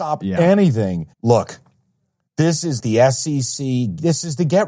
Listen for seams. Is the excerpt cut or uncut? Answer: cut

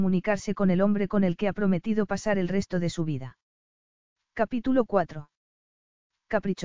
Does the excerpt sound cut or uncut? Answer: uncut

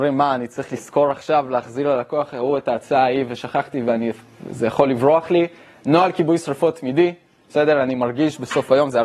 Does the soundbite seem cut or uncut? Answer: uncut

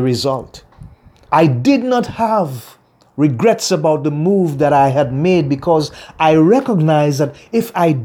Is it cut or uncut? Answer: cut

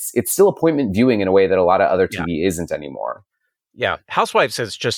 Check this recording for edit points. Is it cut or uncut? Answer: uncut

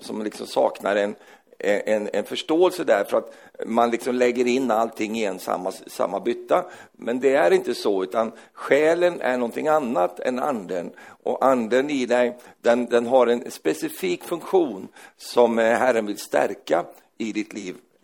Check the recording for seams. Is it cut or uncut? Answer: uncut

